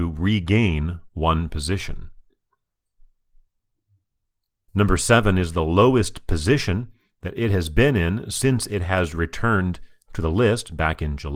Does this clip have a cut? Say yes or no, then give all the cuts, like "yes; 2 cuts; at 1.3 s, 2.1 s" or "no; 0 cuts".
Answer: yes; 1 cut; at 4.7 s